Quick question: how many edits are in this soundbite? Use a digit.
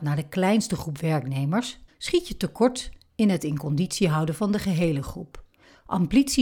1